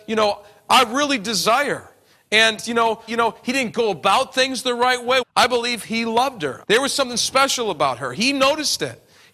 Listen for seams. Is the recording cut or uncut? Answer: cut